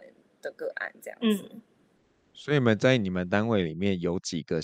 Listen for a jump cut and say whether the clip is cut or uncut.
uncut